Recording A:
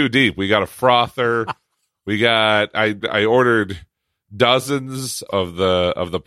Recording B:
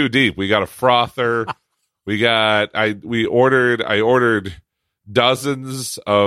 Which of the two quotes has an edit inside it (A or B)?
A